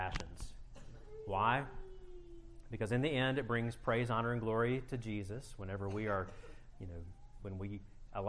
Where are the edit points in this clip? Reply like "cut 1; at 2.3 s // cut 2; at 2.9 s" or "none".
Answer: cut 1; at 7.4 s